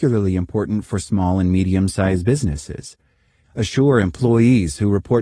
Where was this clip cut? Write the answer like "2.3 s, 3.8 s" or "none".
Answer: 3.4 s